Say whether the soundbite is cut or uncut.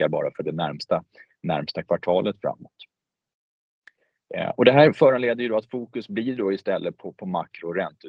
uncut